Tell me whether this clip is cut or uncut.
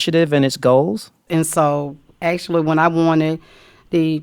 cut